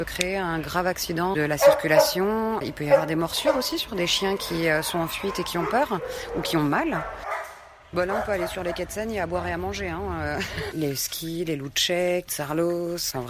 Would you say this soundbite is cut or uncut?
cut